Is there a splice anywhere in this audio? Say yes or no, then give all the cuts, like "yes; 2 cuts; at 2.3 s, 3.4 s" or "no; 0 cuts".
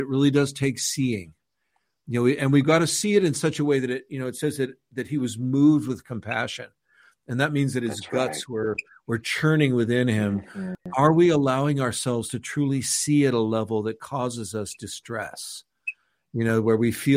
no; 0 cuts